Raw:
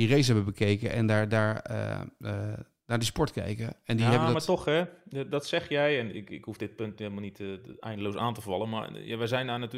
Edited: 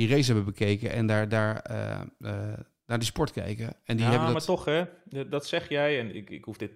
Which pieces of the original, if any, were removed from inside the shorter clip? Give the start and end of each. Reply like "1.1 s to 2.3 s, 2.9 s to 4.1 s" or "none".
none